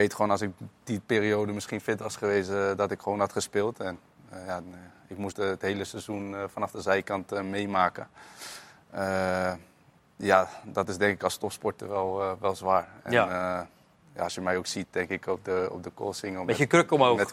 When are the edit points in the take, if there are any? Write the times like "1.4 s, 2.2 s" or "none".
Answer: 5.3 s

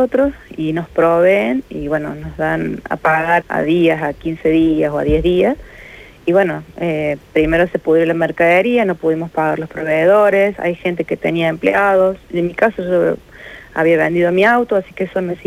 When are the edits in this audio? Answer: 3.4 s

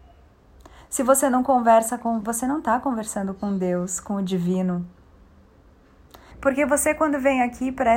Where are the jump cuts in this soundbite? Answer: 2.2 s, 6.3 s

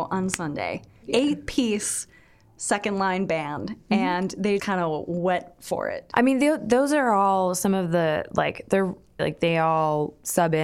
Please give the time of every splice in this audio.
4.6 s, 6.1 s, 9.2 s

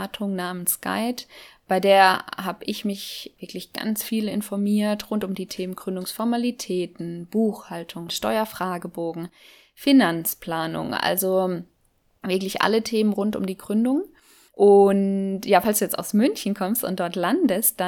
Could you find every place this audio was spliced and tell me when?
8.1 s

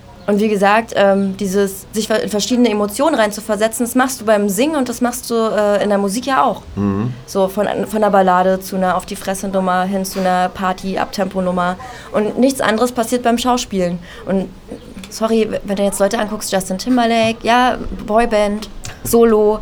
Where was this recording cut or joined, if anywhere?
none

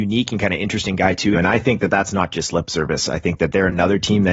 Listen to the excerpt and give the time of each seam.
1.3 s

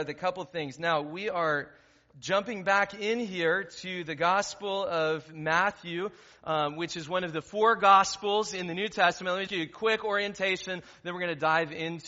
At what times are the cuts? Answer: 9.5 s

